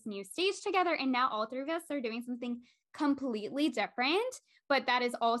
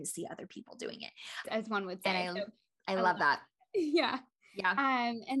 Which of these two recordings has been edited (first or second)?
second